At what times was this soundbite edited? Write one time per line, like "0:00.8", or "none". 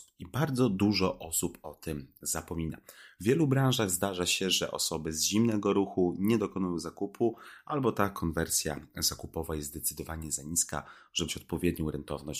0:03.2
0:11.3